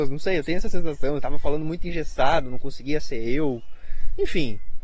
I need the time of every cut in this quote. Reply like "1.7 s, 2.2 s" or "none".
1.2 s